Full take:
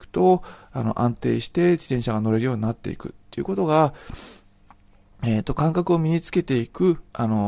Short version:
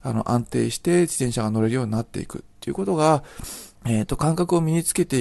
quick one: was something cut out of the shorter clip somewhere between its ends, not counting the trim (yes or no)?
yes